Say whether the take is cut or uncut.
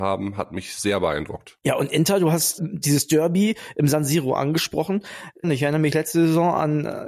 cut